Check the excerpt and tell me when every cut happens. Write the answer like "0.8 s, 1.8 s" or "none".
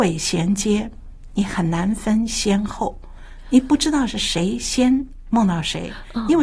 none